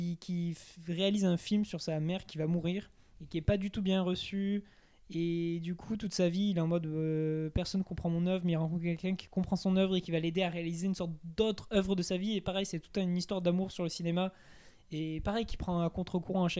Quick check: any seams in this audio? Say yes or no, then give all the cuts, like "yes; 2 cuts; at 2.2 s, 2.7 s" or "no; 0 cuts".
no; 0 cuts